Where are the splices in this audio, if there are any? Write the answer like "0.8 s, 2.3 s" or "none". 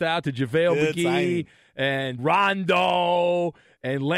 2.2 s

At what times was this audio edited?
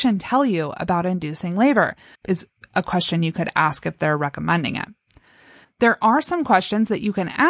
2.1 s, 5.6 s

